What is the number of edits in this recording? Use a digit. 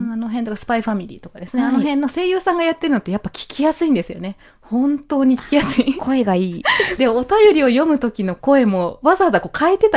1